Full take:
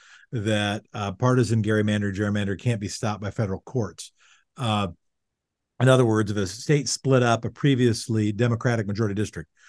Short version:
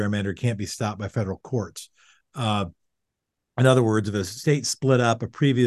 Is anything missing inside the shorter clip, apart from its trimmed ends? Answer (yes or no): no